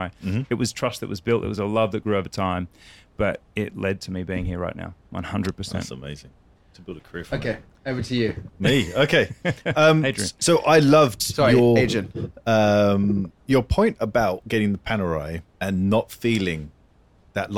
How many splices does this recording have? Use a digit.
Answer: 2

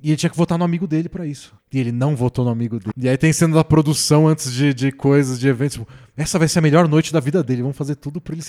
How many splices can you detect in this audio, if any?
1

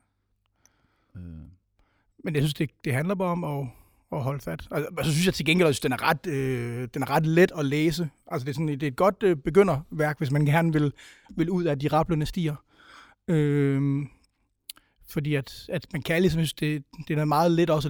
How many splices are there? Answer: 0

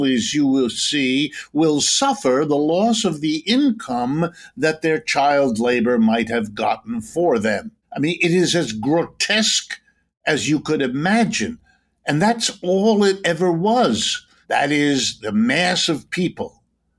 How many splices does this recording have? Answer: 2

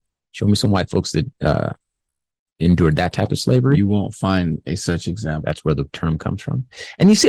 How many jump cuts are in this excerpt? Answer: 2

